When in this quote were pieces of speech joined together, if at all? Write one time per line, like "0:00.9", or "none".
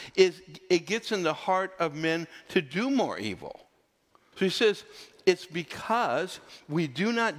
0:04.3